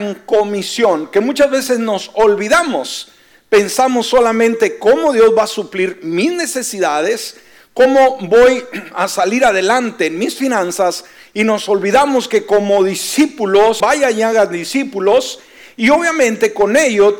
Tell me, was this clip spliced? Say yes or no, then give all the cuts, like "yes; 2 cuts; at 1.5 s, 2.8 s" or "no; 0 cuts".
yes; 1 cut; at 13.8 s